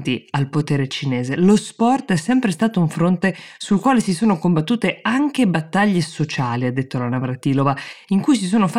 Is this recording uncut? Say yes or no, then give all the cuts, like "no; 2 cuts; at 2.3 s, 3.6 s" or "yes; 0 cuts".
yes; 0 cuts